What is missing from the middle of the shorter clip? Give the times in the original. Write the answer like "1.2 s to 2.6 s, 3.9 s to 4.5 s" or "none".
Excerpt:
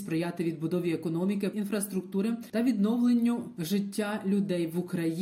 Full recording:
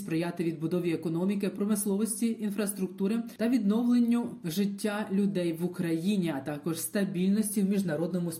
1.5 s to 2.4 s